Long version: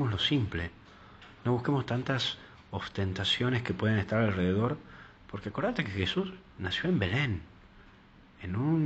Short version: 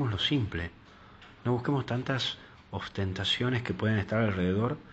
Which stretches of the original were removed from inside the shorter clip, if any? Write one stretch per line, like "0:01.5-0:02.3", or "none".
none